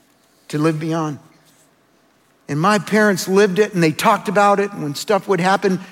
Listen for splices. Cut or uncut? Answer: uncut